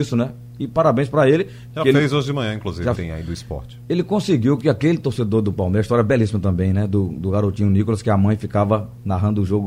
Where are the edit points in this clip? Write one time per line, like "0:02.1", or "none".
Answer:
0:01.7
0:03.0

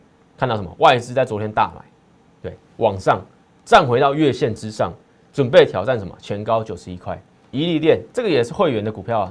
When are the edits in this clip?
0:07.5

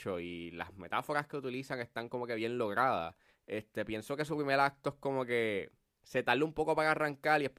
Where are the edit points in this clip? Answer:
0:03.3

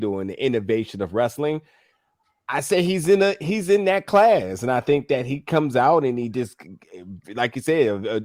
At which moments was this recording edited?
none

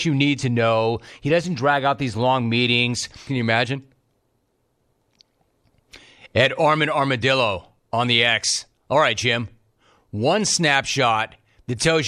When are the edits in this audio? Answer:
0:03.3

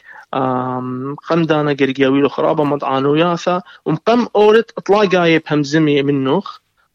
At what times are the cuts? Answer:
0:01.2

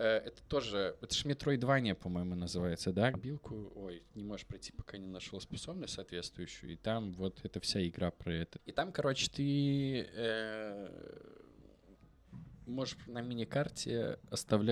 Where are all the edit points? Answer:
0:03.1
0:08.6

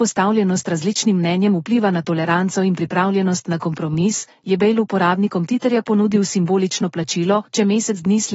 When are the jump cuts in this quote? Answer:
none

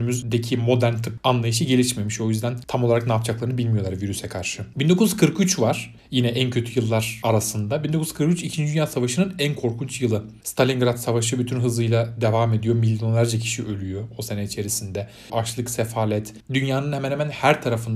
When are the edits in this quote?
0:10.4
0:15.3
0:16.4

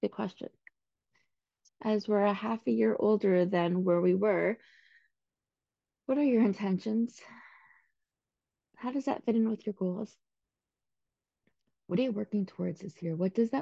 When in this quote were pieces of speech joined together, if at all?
0:01.7

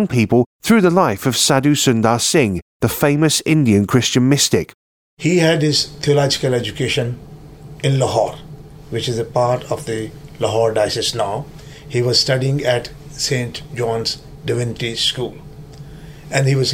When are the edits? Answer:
0:05.0

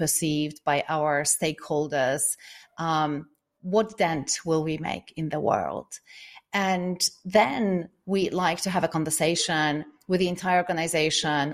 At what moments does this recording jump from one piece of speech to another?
none

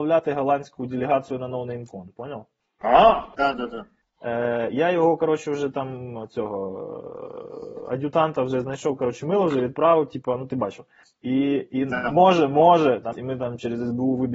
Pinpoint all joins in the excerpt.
0:03.4
0:13.1

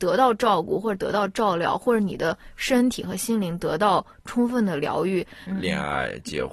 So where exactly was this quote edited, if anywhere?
0:05.5

